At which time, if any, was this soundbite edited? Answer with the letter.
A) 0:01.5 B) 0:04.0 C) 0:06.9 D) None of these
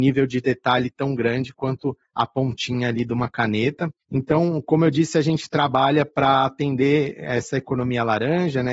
D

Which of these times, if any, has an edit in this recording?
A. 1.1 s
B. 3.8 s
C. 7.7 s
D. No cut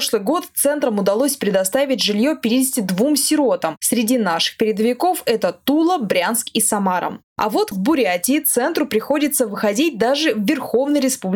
C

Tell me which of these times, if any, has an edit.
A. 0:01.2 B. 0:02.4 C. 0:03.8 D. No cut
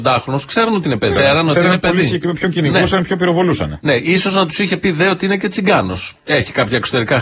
A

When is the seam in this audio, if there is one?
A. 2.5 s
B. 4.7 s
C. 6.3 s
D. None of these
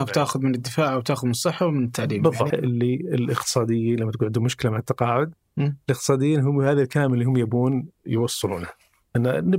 A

